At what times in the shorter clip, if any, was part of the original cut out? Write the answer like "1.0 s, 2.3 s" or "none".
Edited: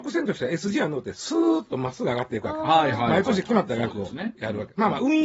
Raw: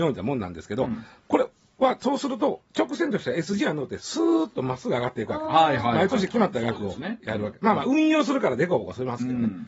none